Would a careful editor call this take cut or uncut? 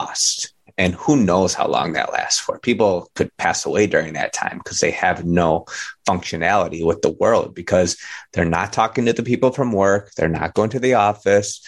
uncut